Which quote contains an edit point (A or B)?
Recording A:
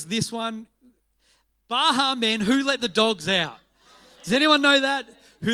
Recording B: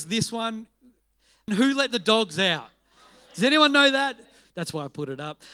B